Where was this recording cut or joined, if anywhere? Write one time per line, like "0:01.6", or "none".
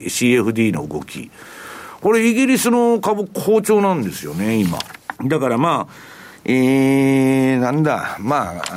0:05.2